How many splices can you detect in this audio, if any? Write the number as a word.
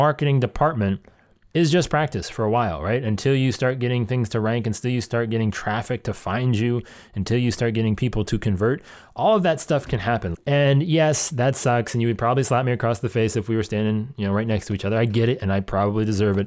one